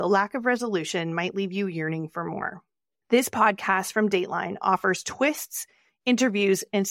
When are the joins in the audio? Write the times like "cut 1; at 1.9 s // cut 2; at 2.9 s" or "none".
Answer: cut 1; at 3.0 s

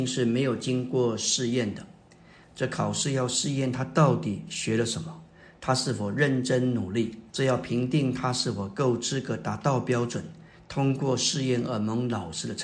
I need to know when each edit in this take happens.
cut 1; at 2.4 s // cut 2; at 7.3 s

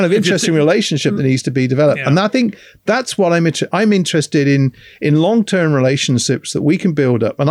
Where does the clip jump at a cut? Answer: none

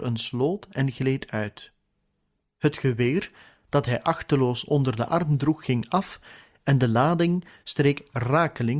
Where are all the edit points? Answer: none

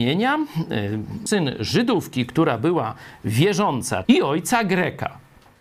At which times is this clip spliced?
cut 1; at 1.3 s // cut 2; at 4.0 s

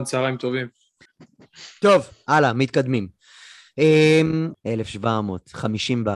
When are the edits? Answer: cut 1; at 1.1 s // cut 2; at 4.5 s

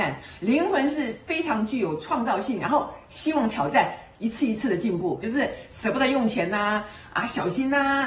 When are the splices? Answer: cut 1; at 5.2 s

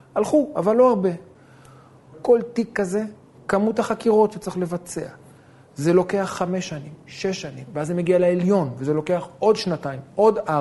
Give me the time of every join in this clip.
cut 1; at 3.3 s

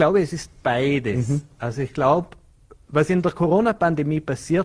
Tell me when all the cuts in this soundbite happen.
none

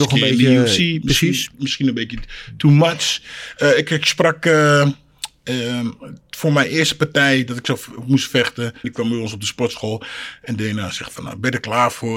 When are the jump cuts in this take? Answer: cut 1; at 8.8 s

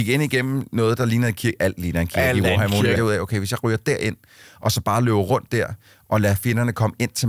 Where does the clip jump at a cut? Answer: cut 1; at 2.9 s

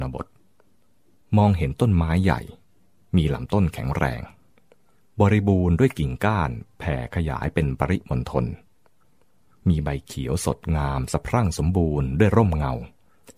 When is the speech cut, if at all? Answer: none

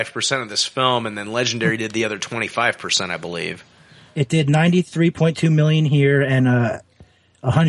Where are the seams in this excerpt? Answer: none

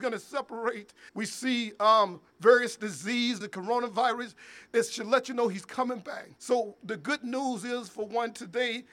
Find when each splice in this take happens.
cut 1; at 1.1 s // cut 2; at 3.4 s // cut 3; at 6.4 s

